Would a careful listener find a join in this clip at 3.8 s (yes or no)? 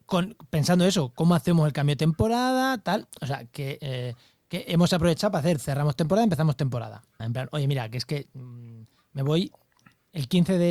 no